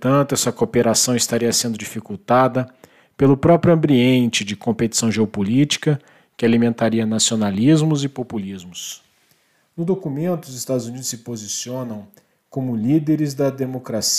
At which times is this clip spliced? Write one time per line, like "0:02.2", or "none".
none